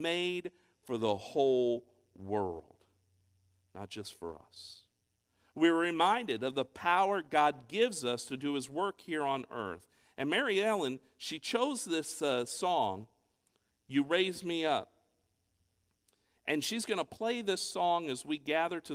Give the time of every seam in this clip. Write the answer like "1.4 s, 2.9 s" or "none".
none

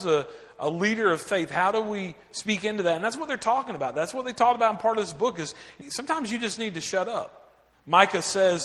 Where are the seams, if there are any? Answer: 5.8 s, 7.7 s

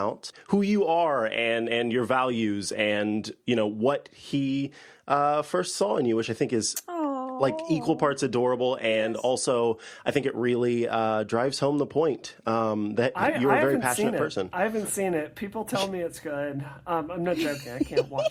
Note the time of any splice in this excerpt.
none

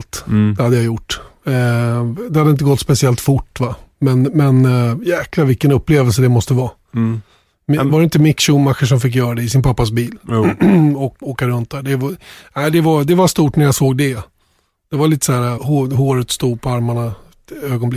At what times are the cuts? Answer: 11.2 s, 15.6 s

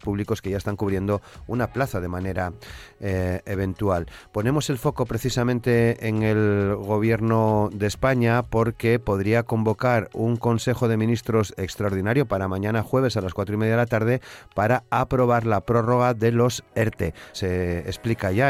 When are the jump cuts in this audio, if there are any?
17.3 s

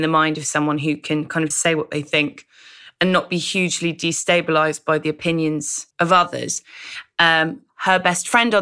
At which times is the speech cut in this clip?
1.5 s, 5.9 s

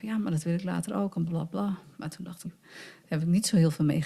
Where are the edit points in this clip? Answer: 1.3 s, 2.5 s

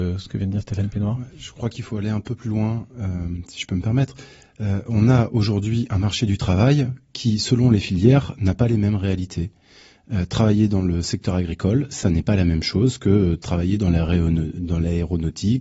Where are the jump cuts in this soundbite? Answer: none

